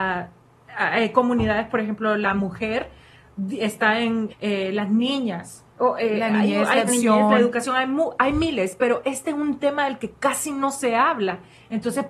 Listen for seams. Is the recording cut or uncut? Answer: cut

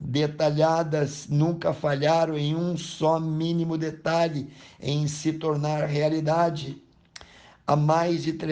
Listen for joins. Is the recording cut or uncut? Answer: uncut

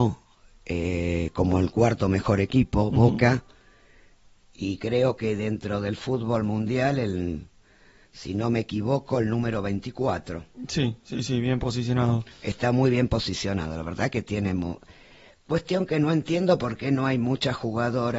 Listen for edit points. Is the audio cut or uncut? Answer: uncut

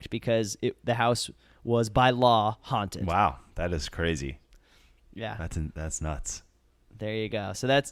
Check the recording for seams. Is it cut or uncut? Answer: uncut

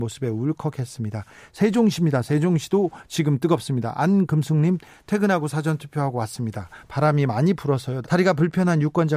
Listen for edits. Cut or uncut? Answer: cut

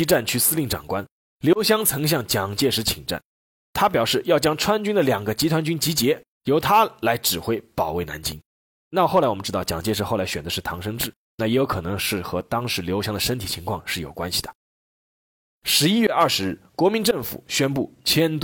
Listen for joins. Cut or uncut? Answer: uncut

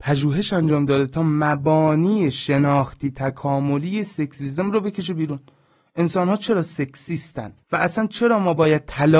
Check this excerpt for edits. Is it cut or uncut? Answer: cut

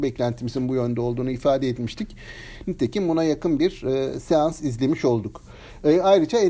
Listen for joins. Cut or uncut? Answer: uncut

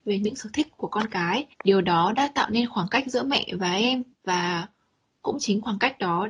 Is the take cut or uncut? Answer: cut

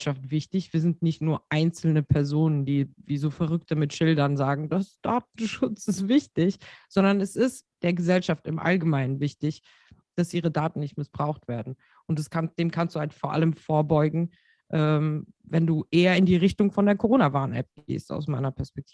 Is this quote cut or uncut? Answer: uncut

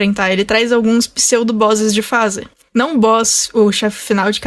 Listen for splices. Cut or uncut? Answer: uncut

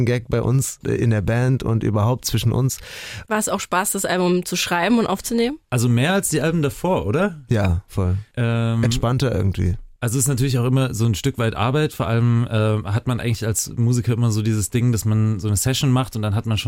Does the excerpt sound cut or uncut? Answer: cut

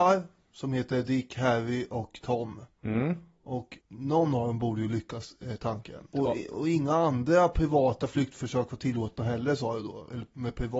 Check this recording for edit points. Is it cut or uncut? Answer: cut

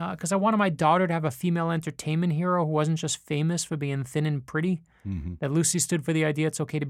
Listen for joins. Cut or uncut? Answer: uncut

